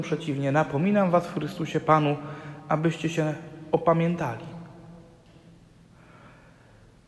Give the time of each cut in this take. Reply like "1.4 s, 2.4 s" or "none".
none